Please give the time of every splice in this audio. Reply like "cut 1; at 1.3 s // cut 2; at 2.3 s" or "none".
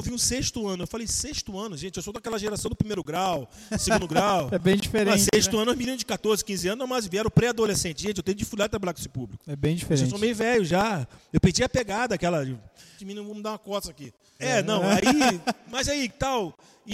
cut 1; at 13.0 s // cut 2; at 14.4 s